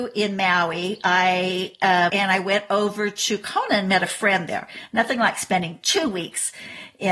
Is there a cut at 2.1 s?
yes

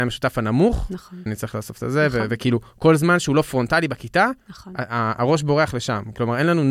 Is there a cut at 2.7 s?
no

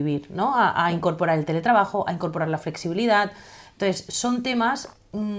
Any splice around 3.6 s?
no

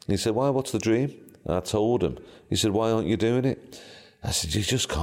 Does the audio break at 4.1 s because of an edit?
no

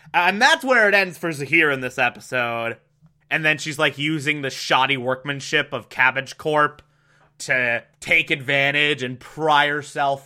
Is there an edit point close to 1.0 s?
no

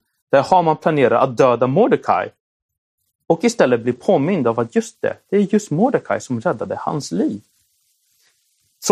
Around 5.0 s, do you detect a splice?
no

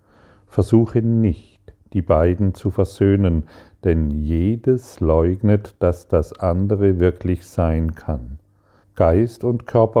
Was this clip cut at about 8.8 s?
yes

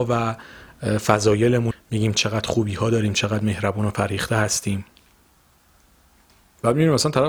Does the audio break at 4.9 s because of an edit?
no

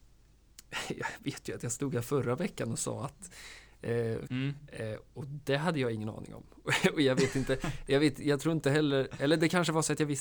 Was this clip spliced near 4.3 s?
yes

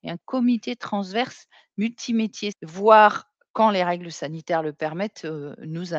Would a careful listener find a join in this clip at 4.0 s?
no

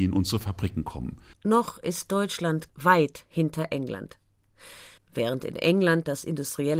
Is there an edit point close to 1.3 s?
yes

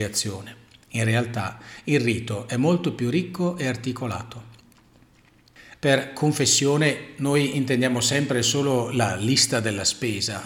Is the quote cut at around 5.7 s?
yes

